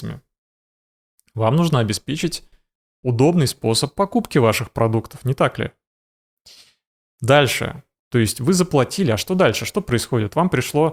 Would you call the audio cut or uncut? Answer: cut